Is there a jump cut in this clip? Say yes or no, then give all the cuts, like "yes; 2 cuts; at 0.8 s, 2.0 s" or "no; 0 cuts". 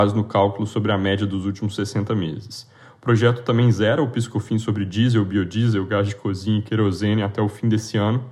no; 0 cuts